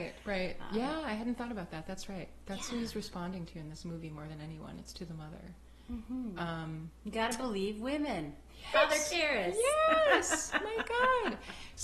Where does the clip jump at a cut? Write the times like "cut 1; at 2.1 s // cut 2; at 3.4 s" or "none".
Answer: cut 1; at 8.7 s